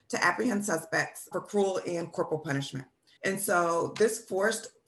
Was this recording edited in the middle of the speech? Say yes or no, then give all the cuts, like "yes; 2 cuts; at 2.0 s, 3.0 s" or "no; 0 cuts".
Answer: yes; 2 cuts; at 1.3 s, 3.2 s